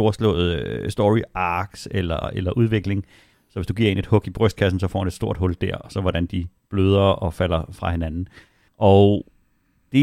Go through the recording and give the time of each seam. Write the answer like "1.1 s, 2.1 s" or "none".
3.3 s, 8.7 s